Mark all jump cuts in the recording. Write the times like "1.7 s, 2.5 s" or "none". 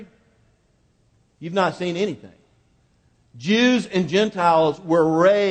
none